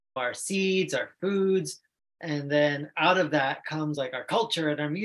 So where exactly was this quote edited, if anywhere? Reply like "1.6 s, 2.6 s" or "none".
none